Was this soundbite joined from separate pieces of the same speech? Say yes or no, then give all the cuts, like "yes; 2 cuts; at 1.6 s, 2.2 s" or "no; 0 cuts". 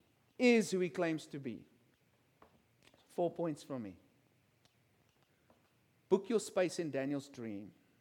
no; 0 cuts